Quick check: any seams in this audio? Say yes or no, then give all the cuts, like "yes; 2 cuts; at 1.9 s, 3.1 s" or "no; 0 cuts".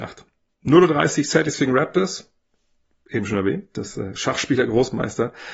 no; 0 cuts